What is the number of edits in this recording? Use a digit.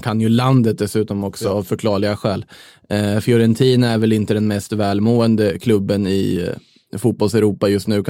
0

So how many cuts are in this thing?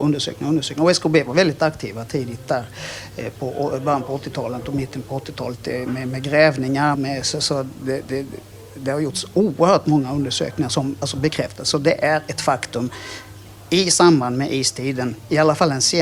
1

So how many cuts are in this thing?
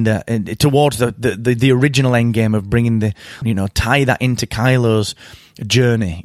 1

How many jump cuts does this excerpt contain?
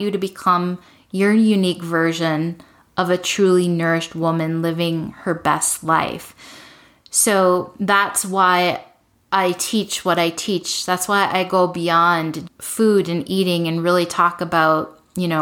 1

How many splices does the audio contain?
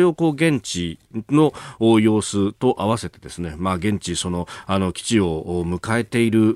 0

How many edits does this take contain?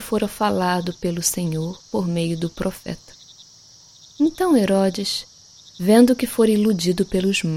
1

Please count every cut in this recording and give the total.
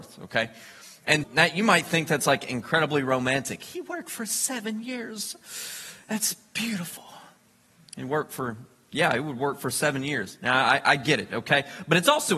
1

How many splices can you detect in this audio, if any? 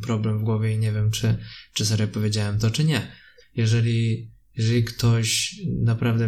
1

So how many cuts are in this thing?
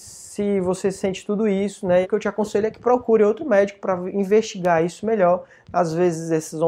1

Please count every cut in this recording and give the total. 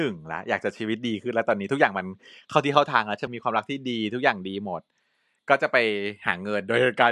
1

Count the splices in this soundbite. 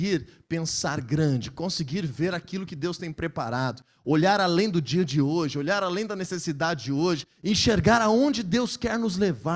0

